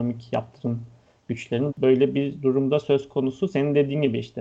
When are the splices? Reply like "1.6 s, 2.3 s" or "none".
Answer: 1.7 s